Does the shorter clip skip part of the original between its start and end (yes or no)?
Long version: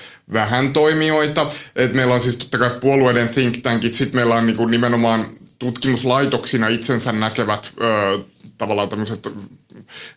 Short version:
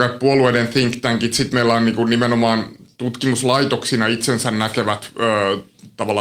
no